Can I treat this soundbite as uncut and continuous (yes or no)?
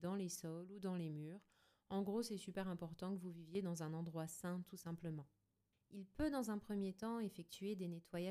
no